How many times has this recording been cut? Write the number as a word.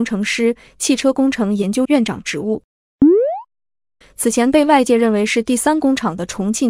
two